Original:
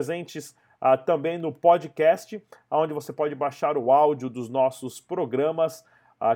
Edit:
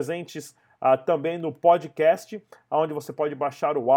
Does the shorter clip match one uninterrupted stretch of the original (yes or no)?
yes